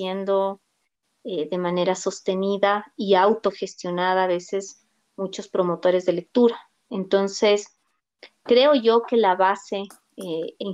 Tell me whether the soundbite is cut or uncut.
uncut